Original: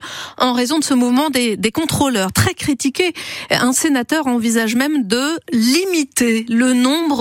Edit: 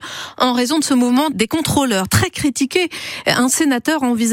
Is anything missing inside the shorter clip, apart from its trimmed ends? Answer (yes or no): yes